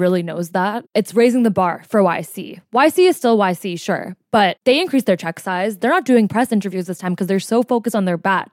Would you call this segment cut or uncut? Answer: cut